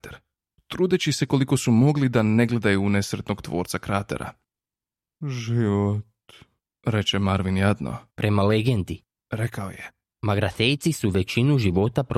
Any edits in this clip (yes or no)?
yes